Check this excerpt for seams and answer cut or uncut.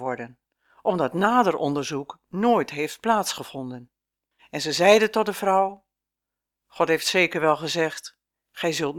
cut